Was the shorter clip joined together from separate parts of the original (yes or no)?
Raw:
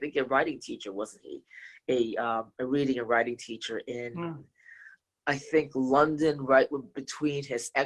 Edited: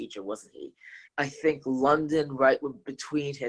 yes